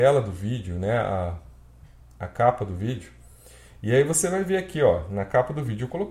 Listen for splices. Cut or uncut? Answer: uncut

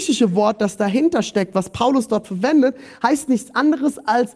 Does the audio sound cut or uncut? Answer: uncut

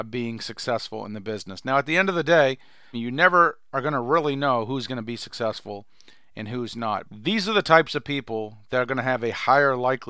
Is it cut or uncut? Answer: cut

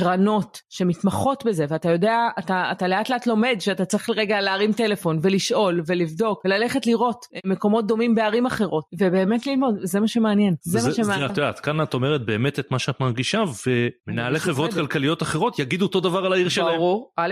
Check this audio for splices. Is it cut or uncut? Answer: cut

